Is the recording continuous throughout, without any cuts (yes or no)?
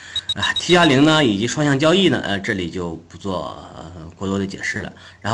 yes